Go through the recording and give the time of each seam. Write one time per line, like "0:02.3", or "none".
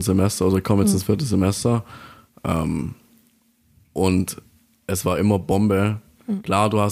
none